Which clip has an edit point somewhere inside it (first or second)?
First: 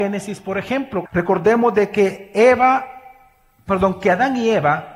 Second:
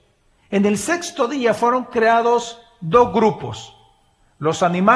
first